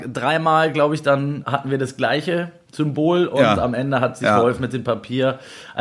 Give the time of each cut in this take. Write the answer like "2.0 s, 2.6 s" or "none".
1.4 s